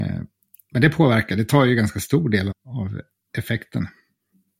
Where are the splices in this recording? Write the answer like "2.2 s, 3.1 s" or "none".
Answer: 2.5 s